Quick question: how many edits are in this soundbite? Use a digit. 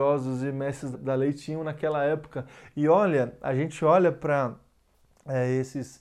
1